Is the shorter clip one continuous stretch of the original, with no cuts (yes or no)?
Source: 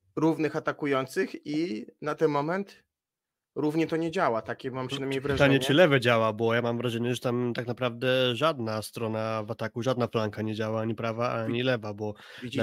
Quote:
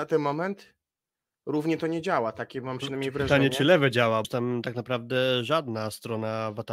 no